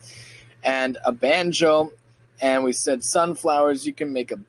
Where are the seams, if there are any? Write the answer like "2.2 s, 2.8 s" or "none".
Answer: none